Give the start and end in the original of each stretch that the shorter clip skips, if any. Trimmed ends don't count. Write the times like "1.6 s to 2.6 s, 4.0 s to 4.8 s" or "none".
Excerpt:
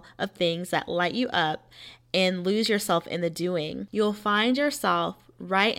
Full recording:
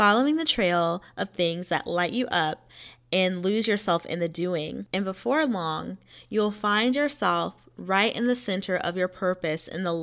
4.9 s to 6.3 s